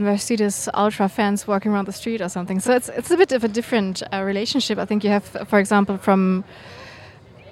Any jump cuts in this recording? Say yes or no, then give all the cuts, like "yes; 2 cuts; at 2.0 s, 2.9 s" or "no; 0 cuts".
no; 0 cuts